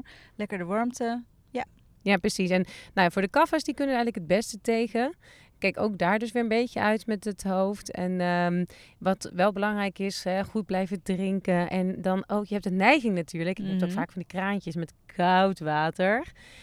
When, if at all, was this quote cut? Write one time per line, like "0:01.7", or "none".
none